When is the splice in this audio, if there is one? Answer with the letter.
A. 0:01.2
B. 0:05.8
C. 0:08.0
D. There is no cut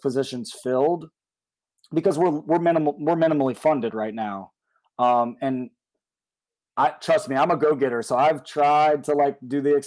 D